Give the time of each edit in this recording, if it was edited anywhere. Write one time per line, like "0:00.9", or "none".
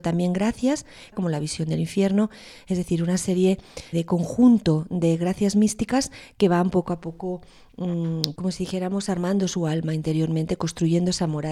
0:01.1
0:03.9
0:08.4